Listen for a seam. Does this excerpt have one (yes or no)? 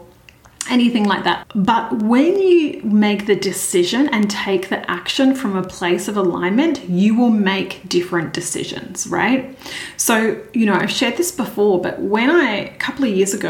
yes